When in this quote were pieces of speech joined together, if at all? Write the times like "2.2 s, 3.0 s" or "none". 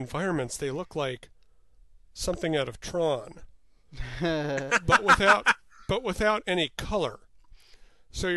none